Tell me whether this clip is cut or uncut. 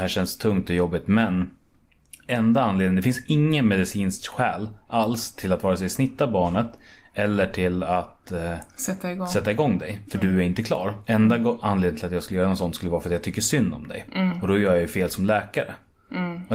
uncut